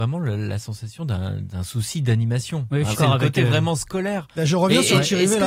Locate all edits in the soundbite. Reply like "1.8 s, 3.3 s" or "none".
2.9 s